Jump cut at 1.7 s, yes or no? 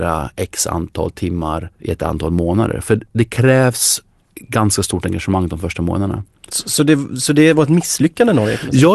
yes